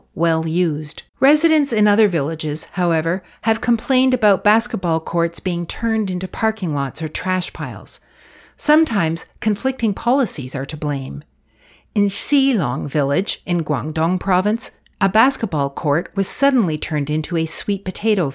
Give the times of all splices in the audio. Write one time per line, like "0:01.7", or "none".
0:01.1